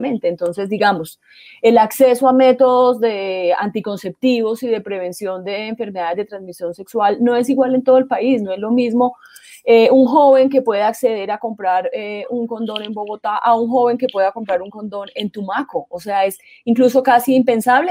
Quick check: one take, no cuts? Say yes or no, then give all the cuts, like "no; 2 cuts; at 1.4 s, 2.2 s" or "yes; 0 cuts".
yes; 0 cuts